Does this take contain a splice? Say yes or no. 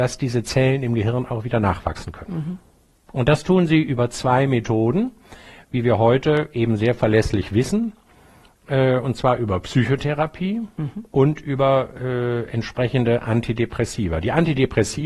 no